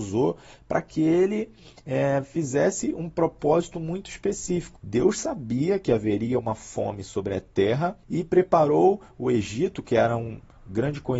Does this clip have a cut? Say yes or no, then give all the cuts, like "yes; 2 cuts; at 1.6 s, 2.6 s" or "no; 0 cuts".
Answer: yes; 2 cuts; at 4.8 s, 8.0 s